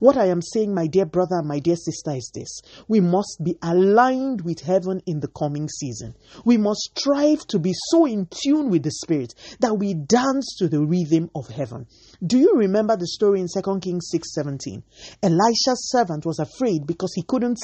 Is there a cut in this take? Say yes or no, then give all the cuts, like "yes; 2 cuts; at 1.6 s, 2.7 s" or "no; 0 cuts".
no; 0 cuts